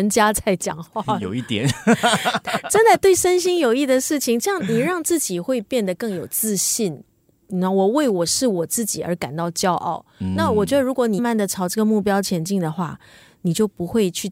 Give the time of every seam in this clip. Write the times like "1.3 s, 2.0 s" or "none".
11.2 s